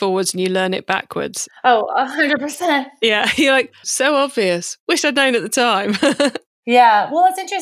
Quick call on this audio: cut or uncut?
cut